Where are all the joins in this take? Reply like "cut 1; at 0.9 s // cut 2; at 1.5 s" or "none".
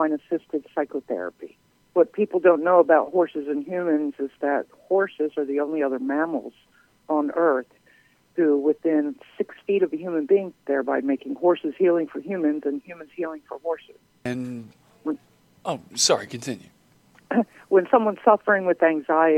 cut 1; at 10.5 s